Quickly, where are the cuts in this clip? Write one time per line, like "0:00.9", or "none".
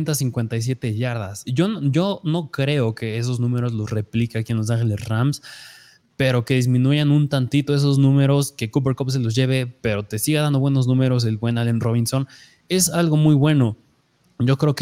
0:01.4